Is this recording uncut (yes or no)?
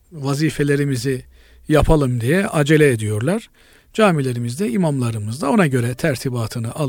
yes